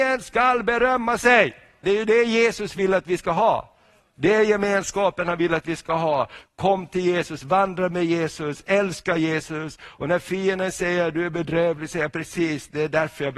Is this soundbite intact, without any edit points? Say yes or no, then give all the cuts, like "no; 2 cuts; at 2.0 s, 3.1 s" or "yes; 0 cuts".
no; 1 cut; at 1.8 s